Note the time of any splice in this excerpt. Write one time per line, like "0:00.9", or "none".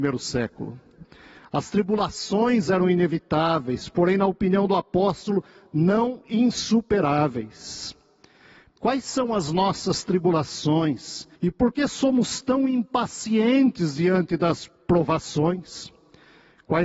0:08.8
0:11.3
0:14.8